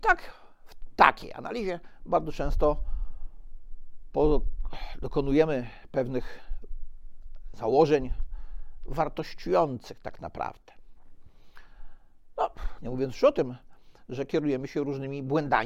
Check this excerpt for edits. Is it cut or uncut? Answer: uncut